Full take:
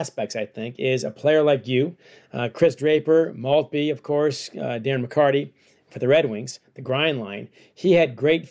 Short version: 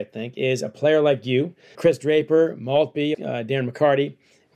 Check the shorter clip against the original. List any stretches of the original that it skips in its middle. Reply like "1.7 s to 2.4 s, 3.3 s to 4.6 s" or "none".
2.2 s to 2.5 s, 3.9 s to 4.5 s